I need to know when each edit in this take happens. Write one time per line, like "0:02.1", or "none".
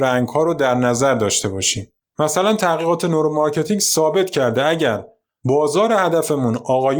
none